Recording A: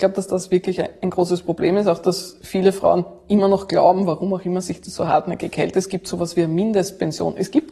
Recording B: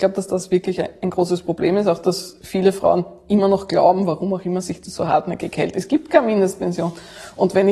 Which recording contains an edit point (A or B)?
B